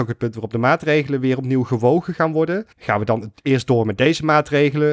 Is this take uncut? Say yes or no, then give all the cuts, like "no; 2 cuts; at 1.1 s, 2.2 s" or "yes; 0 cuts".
no; 1 cut; at 2.7 s